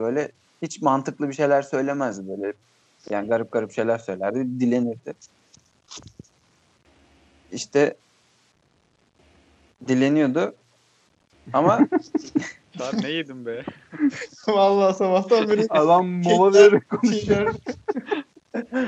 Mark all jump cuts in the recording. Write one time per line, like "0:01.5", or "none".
none